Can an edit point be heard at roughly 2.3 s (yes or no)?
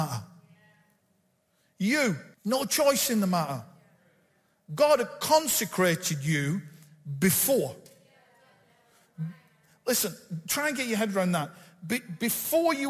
yes